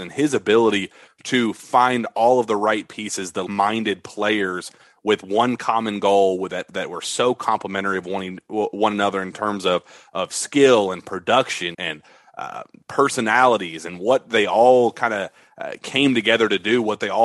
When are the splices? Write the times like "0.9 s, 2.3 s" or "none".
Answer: 3.5 s, 11.7 s